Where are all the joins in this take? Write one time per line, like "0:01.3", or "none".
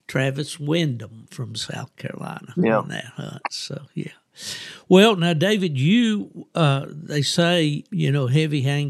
0:07.9